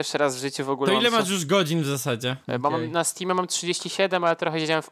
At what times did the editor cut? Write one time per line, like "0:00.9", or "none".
0:02.4